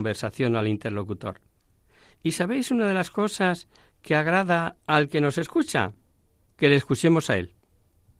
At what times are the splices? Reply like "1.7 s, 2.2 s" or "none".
none